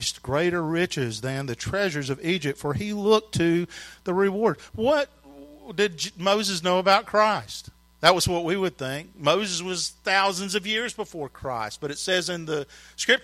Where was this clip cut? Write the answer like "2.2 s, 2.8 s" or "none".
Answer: none